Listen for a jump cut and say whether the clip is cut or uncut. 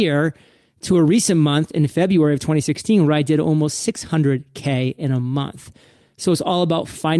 uncut